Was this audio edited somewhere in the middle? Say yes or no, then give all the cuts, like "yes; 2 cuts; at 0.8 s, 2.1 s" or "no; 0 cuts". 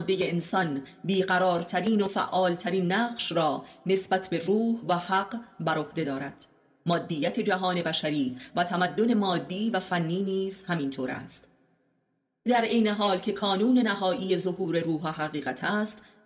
no; 0 cuts